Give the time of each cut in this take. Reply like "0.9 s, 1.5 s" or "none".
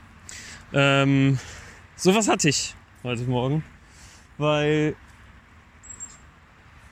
none